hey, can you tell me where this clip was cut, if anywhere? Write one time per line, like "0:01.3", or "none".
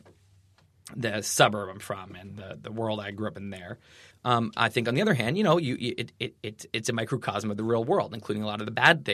0:04.1

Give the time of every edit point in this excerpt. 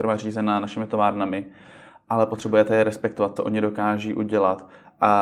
0:03.4

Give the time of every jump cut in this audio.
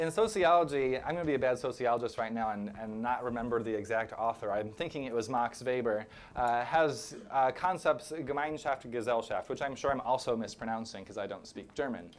none

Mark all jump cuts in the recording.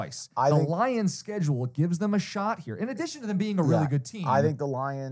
none

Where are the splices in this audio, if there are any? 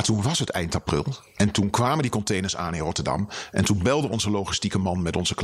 none

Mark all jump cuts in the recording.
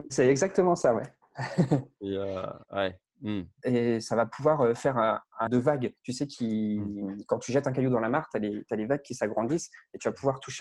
0:03.6
0:05.5

